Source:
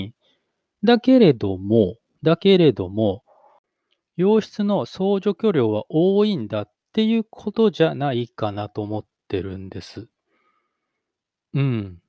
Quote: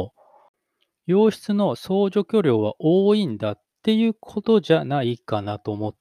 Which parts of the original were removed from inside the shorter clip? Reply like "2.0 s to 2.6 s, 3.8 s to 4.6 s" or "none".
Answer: none

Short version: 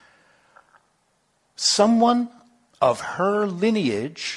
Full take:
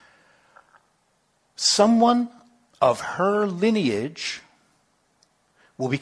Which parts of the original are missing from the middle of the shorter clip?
none

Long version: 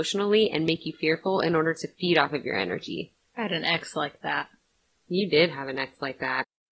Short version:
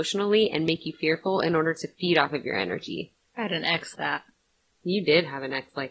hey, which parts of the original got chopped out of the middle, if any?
3.9 s to 4.2 s

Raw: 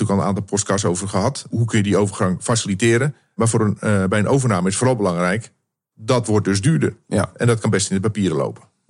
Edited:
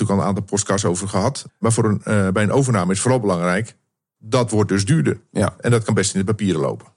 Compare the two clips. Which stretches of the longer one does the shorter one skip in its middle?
1.5 s to 3.2 s

